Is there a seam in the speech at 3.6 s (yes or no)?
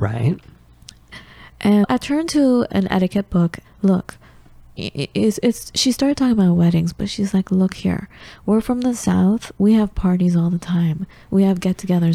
yes